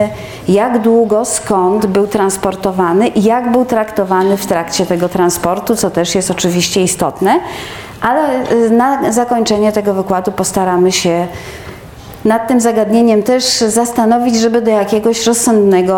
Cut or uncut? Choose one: uncut